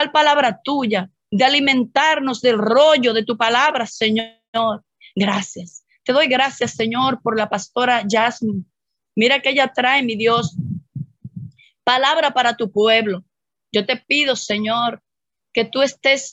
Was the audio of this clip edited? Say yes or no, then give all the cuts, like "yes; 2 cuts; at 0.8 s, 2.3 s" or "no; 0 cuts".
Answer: no; 0 cuts